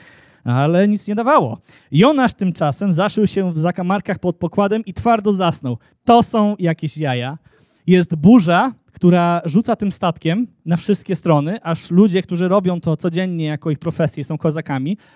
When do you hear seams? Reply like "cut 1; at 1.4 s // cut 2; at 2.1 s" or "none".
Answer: cut 1; at 7.8 s